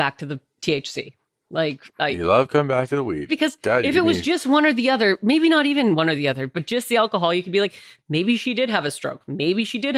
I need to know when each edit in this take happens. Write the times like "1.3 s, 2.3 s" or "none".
3.3 s